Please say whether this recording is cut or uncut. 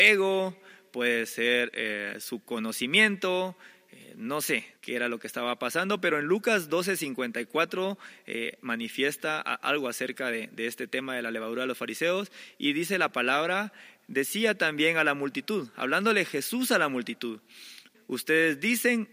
cut